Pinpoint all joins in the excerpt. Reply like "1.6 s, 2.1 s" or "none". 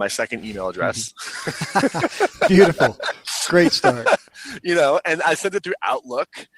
none

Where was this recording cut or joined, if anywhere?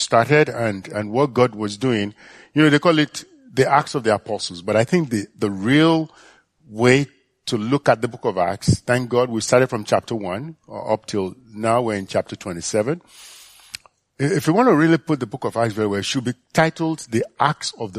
none

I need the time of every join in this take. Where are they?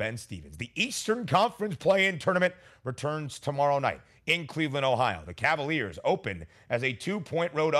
none

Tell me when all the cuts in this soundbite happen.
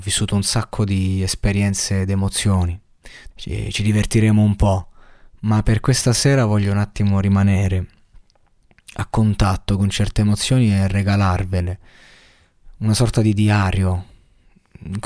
3.3 s

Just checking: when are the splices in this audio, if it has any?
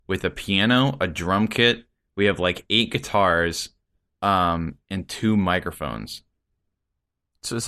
4.1 s

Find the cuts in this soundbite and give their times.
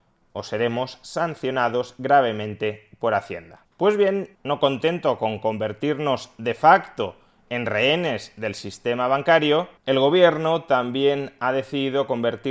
4.3 s, 9.8 s

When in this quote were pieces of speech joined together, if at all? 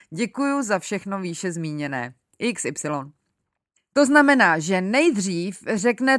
3.8 s

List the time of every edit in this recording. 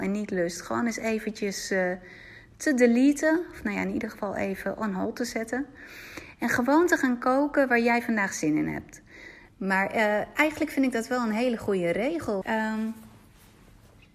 9.5 s, 12.4 s

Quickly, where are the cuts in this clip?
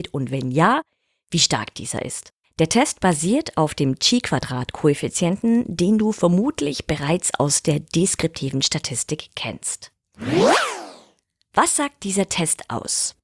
2.4 s

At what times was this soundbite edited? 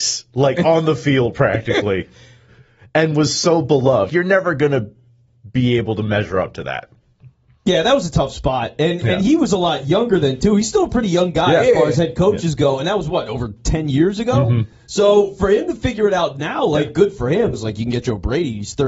4.1 s, 17.5 s

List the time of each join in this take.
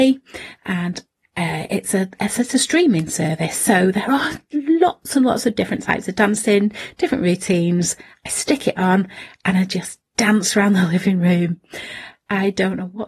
none

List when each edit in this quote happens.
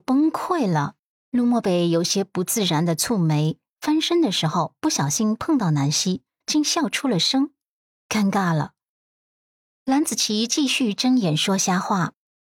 1.1 s, 6.4 s, 8.9 s

